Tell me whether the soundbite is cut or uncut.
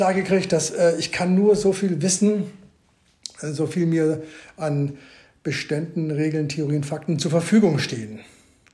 uncut